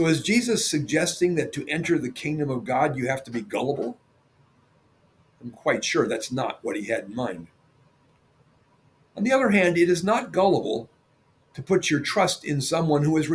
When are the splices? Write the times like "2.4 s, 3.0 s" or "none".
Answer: none